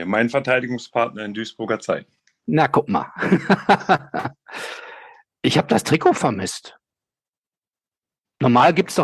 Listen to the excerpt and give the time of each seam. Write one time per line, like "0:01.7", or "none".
none